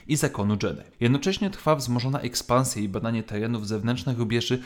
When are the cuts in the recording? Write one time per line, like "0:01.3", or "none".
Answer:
0:00.9